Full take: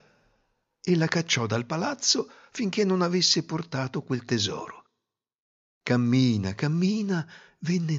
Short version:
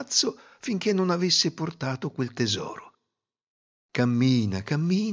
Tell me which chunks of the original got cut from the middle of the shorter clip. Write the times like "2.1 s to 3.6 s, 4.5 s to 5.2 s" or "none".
none